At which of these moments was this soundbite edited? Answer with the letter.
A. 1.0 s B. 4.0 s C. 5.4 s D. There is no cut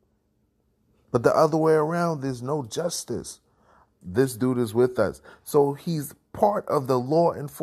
B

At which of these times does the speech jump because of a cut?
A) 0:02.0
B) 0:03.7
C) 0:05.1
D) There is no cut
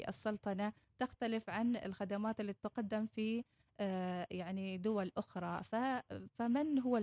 D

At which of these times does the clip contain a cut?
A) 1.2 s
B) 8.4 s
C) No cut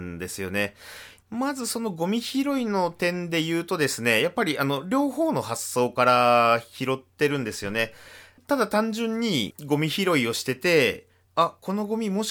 A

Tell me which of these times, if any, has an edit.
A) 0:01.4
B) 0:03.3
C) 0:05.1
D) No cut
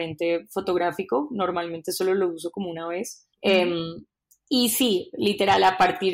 B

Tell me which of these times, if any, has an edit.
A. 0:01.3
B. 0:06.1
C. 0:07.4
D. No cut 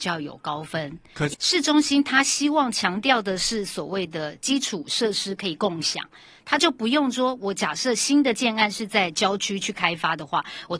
A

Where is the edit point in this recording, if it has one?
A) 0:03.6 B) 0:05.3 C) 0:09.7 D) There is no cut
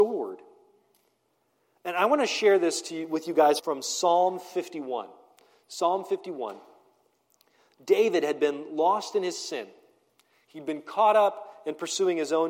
A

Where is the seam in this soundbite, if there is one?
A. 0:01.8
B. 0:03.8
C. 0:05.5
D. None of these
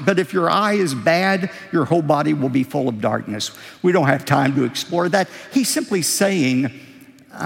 D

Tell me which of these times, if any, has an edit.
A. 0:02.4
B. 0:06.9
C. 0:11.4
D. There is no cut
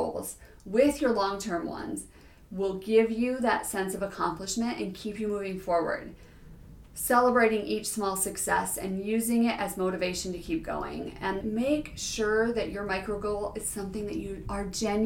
C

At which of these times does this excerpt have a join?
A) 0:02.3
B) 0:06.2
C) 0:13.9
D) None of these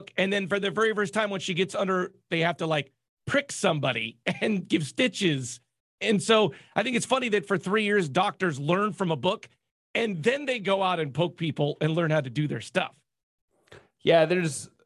A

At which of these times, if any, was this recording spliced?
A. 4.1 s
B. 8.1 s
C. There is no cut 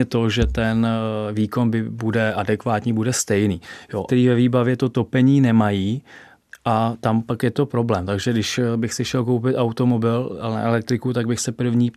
A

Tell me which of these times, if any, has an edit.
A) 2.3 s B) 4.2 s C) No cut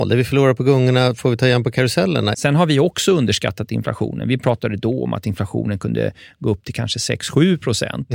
A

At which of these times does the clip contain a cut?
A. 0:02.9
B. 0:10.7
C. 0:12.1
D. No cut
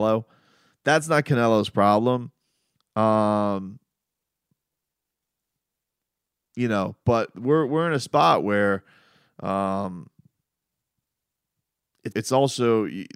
C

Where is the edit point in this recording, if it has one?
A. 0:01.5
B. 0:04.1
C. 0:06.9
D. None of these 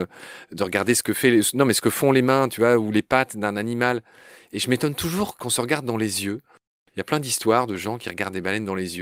D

